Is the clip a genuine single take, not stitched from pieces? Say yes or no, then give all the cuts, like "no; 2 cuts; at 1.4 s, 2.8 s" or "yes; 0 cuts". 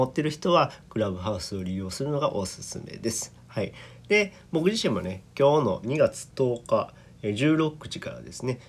no; 1 cut; at 5.8 s